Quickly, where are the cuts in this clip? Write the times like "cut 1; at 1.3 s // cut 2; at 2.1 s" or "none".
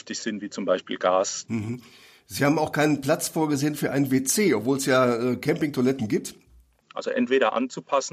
cut 1; at 1.5 s // cut 2; at 6.8 s